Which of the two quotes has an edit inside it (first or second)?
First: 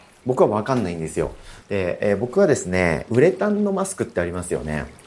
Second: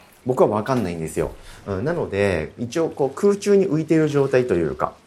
first